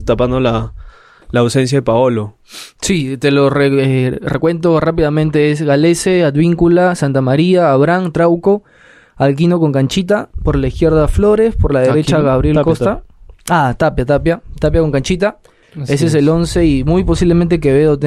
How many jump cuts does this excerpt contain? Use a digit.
1